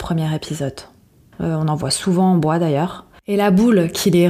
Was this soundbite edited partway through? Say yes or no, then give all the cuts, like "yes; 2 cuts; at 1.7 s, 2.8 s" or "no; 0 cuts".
yes; 1 cut; at 1.4 s